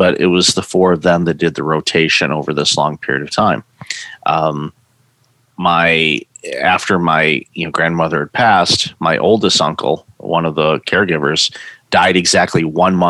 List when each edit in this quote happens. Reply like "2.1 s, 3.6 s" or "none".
none